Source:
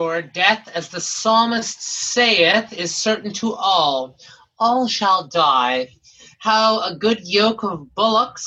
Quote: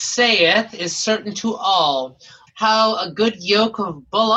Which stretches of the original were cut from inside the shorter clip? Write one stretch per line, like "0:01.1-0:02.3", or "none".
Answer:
0:04.5-0:06.3